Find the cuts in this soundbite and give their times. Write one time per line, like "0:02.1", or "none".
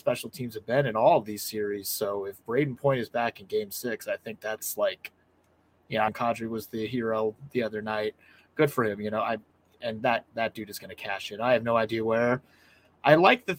0:06.1